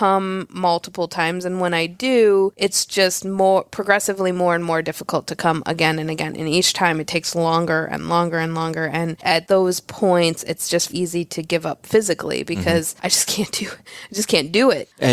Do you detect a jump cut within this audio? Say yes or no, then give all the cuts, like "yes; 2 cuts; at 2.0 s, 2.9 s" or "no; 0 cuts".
yes; 1 cut; at 10.9 s